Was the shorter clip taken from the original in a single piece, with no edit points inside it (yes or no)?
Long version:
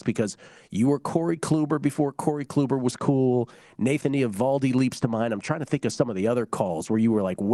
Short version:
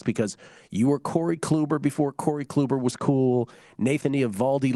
yes